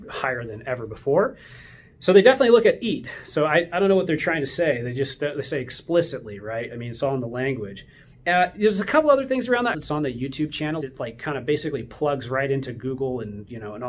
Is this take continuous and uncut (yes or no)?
no